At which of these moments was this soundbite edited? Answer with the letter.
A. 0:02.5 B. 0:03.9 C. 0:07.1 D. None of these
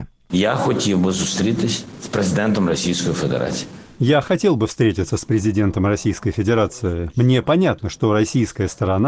C